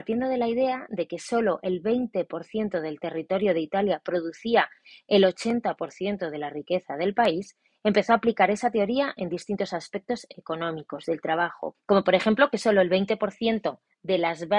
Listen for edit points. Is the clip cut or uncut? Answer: cut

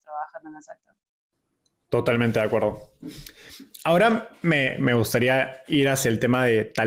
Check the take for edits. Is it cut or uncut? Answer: uncut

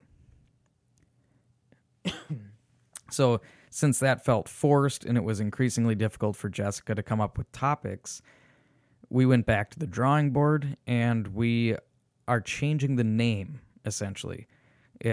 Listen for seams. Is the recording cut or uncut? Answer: uncut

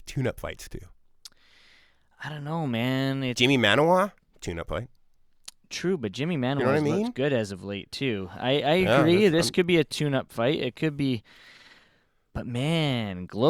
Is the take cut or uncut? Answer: cut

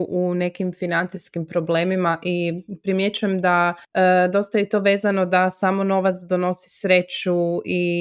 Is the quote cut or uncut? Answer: cut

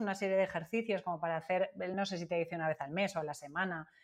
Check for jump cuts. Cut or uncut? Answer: uncut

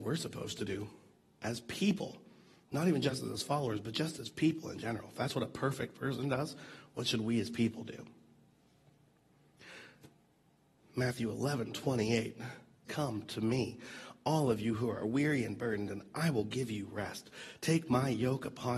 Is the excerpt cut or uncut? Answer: cut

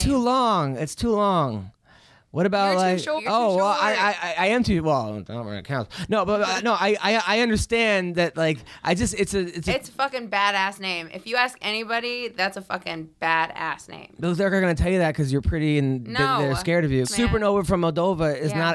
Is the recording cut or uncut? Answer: cut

